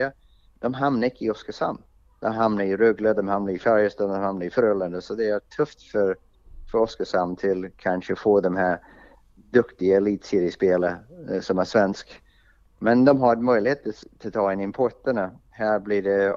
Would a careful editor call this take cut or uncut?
uncut